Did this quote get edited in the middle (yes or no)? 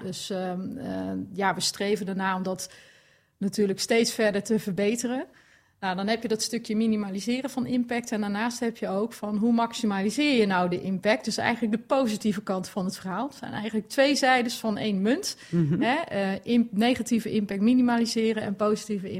no